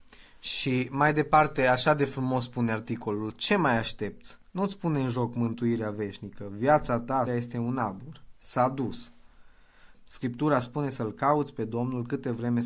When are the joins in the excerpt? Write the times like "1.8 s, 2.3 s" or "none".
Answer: 7.3 s, 9.9 s